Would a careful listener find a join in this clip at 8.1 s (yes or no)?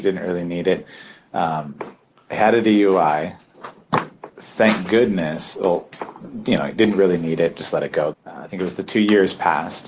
yes